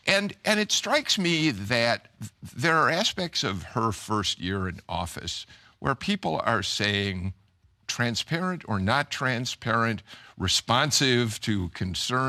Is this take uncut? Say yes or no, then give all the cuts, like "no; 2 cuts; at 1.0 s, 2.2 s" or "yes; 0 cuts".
yes; 0 cuts